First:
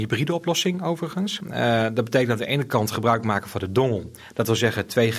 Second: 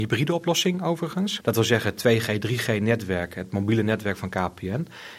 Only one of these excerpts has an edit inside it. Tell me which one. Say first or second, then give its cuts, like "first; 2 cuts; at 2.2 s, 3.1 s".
second; 1 cut; at 1.4 s